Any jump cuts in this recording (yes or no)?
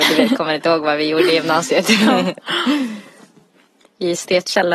no